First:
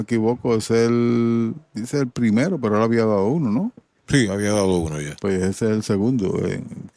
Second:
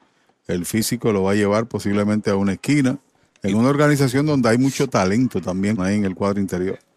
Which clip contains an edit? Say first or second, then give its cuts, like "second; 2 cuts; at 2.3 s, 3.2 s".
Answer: second; 1 cut; at 5.8 s